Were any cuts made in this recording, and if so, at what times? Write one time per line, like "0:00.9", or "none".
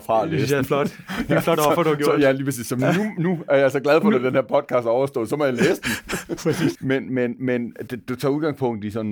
0:06.8
0:07.9